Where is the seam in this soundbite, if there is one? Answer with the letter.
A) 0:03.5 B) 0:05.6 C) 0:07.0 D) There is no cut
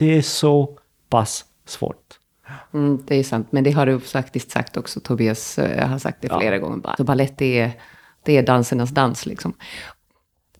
C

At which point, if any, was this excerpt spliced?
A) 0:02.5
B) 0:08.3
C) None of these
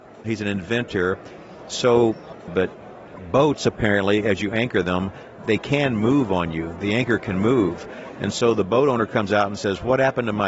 A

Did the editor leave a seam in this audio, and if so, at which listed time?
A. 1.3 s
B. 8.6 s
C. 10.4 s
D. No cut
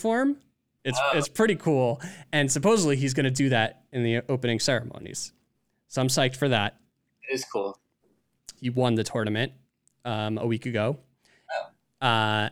B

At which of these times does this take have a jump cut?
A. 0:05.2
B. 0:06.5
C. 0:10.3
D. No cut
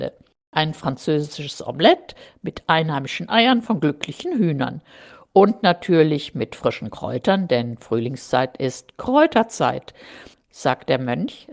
C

